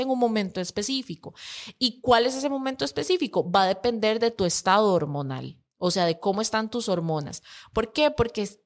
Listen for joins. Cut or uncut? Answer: uncut